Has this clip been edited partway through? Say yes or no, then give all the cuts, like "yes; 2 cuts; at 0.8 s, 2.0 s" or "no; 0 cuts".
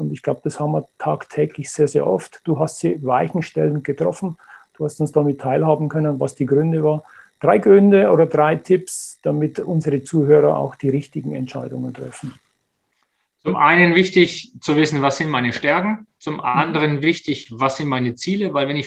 no; 0 cuts